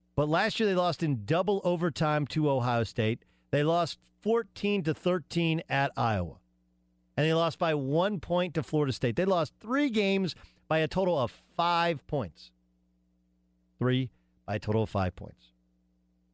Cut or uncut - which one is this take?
uncut